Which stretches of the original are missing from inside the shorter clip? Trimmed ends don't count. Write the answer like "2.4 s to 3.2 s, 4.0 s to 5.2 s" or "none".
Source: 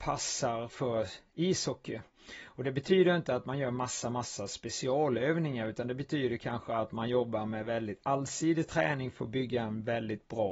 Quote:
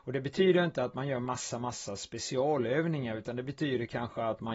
none